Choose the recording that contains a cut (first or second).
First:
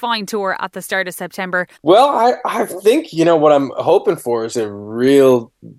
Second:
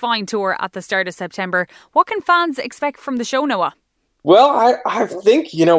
first